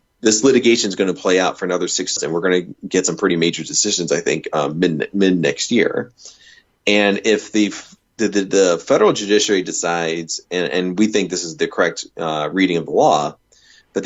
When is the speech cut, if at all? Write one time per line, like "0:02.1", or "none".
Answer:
0:02.2